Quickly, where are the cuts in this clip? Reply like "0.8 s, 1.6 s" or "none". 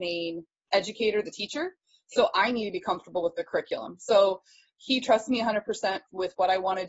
none